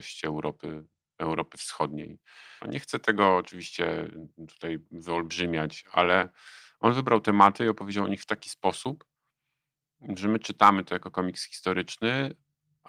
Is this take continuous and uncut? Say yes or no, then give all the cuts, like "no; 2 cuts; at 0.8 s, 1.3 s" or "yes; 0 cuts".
no; 1 cut; at 2.6 s